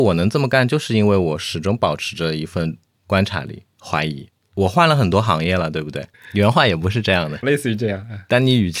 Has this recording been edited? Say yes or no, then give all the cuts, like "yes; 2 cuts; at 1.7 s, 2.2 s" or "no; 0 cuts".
yes; 3 cuts; at 3.6 s, 6.1 s, 7.4 s